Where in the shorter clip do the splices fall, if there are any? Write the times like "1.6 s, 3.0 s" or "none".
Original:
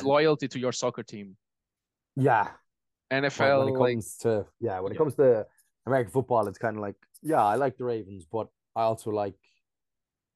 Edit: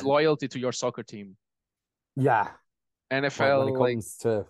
none